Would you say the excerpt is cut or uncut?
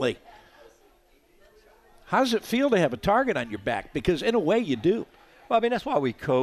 uncut